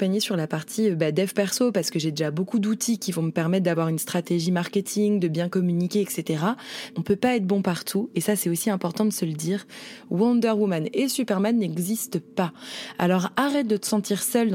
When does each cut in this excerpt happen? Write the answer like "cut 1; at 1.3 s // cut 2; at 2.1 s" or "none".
cut 1; at 6.9 s